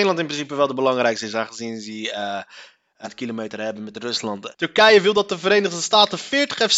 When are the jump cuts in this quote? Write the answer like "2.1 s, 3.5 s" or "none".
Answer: 3.0 s, 4.5 s